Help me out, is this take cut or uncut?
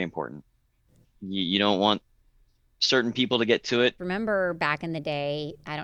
cut